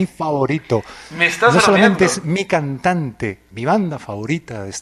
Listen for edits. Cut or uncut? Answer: cut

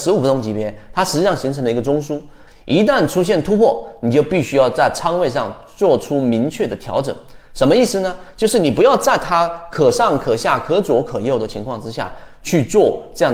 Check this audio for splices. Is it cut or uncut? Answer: cut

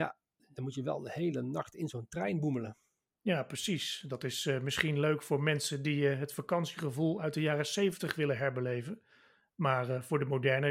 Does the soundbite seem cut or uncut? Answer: uncut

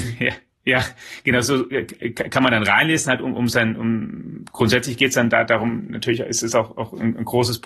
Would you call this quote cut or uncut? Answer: uncut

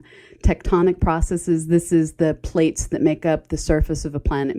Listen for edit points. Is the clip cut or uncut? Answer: uncut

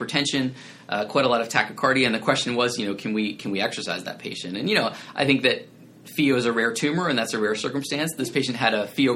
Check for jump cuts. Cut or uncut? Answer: cut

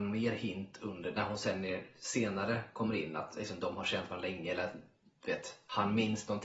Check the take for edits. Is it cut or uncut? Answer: uncut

